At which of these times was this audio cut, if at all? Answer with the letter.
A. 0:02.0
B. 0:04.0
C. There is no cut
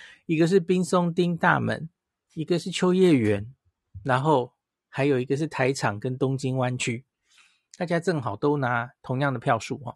C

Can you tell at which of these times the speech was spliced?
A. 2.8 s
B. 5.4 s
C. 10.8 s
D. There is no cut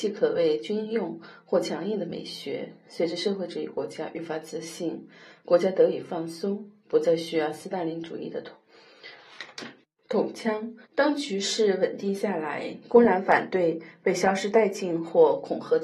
C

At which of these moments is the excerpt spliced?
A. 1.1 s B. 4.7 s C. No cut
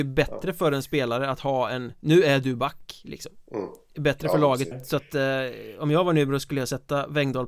B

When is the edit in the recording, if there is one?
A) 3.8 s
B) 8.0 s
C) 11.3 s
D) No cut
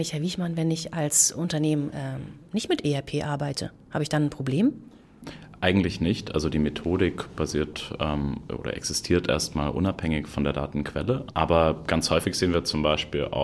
C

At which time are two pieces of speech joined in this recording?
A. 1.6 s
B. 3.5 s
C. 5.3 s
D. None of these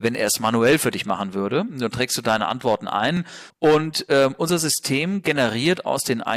B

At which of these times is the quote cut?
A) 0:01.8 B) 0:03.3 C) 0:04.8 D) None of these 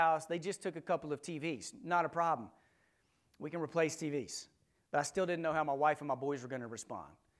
D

